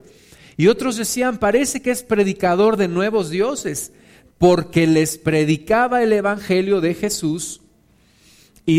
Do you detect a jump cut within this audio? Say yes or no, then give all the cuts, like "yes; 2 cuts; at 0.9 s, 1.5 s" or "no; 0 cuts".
no; 0 cuts